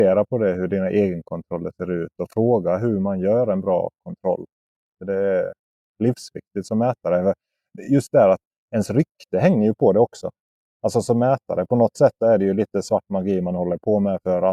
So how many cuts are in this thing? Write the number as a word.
zero